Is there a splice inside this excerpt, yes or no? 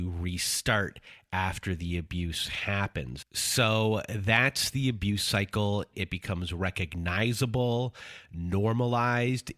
yes